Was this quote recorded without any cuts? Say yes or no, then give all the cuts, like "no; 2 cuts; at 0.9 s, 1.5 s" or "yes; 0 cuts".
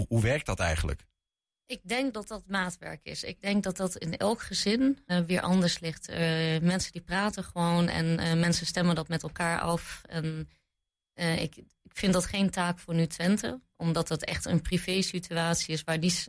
no; 1 cut; at 5.1 s